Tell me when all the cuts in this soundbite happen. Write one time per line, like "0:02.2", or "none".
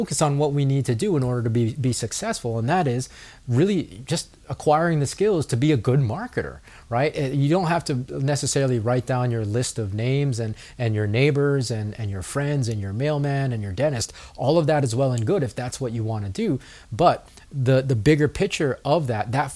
none